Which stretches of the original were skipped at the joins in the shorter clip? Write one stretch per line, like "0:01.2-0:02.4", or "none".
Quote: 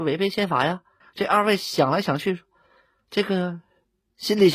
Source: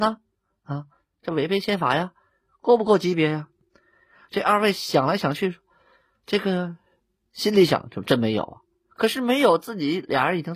0:02.3-0:04.2